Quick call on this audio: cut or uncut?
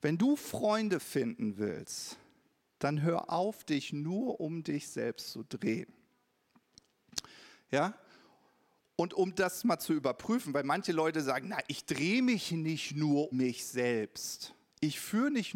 cut